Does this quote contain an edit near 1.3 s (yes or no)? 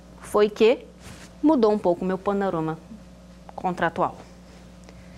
yes